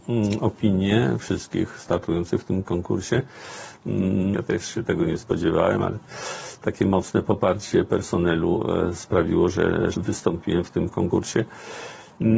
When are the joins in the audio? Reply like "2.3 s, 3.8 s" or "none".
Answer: 4.3 s, 9.9 s